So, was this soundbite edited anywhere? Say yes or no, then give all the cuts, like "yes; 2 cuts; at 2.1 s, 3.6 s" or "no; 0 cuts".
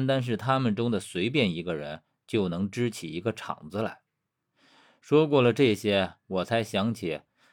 no; 0 cuts